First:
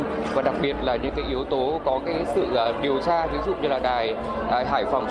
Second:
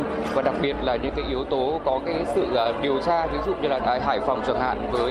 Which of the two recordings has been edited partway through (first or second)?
second